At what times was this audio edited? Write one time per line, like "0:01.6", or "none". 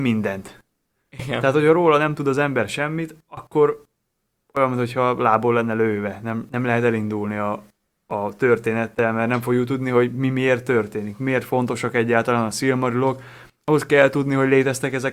none

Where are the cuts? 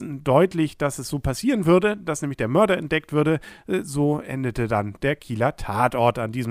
none

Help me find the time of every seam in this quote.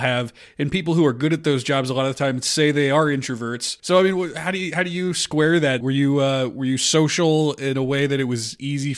0:03.8
0:05.8

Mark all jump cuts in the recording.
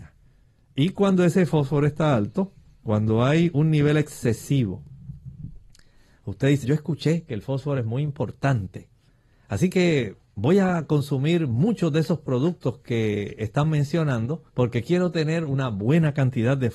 0:06.6
0:14.5

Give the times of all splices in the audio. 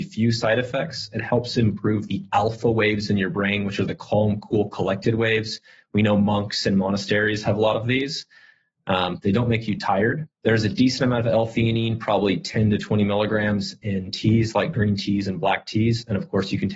0:10.3

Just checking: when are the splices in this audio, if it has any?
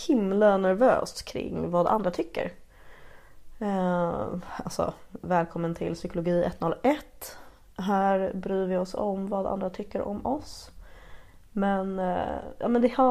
none

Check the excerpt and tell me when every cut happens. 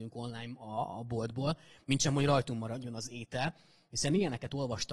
none

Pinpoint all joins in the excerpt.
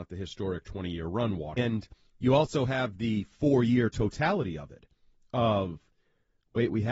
0:01.6

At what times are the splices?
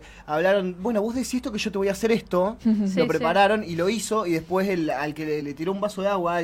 0:05.4

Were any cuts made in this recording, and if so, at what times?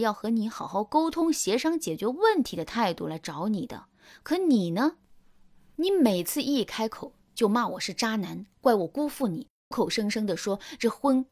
0:09.7

